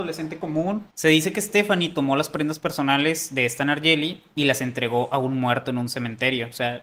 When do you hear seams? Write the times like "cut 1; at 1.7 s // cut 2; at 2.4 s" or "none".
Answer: cut 1; at 0.9 s